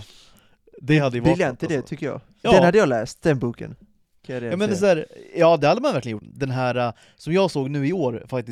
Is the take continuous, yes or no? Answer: no